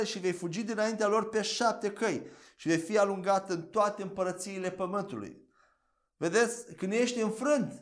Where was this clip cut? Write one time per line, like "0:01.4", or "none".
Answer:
none